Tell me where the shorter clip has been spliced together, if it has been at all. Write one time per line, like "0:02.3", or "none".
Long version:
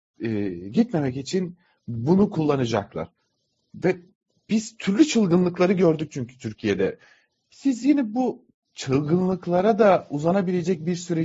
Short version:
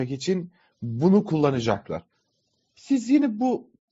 0:02.6

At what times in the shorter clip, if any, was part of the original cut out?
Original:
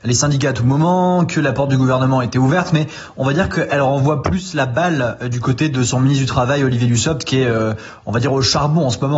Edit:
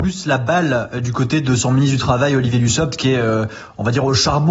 none

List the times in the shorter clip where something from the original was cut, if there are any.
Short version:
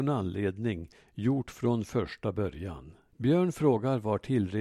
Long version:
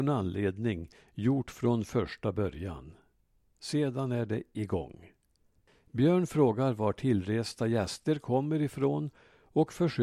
0:03.1

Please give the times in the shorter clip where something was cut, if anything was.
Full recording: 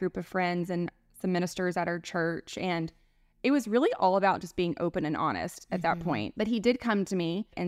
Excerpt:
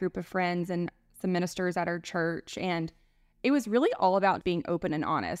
0:04.4

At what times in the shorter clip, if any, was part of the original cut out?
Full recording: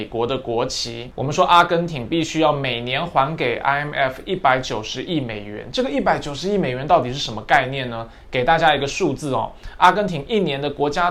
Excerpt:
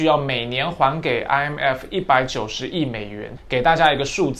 0:03.4

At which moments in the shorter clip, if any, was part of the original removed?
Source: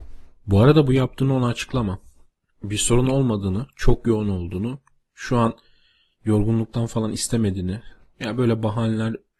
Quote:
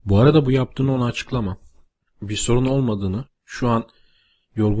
0:03.3

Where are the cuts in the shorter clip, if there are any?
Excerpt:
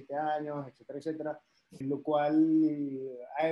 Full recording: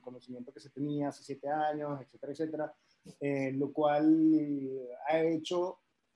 0:01.8

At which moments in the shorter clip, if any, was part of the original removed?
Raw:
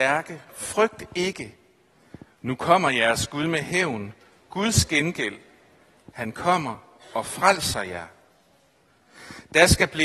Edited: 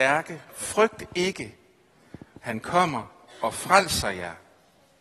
0:02.3

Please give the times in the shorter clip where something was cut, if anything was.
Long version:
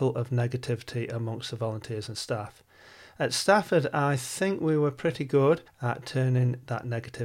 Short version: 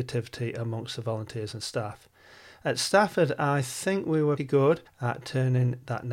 0:04.4

